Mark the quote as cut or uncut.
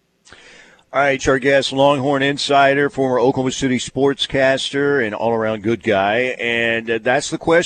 cut